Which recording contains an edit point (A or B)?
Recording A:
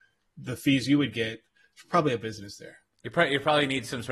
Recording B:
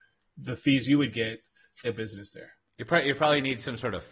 B